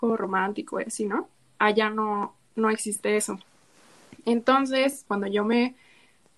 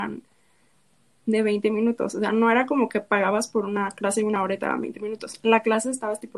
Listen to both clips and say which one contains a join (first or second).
first